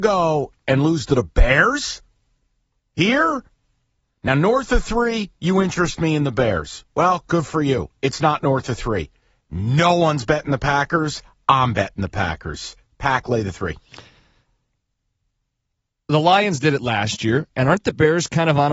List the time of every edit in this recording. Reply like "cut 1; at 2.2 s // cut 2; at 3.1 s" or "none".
none